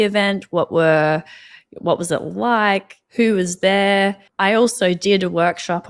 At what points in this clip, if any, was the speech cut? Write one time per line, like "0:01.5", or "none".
0:04.3